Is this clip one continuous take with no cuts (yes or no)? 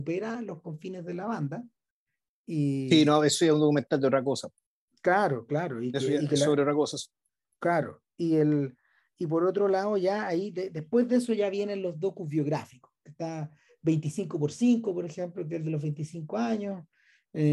yes